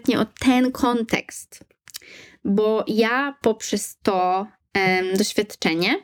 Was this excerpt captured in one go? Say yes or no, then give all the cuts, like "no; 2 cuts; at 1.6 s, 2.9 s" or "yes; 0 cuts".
yes; 0 cuts